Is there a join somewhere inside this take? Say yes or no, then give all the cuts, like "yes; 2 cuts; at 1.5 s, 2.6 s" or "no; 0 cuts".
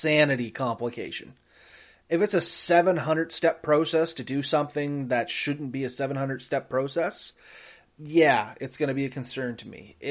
no; 0 cuts